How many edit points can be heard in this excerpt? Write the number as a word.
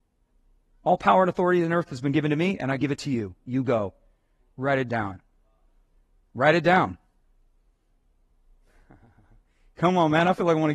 one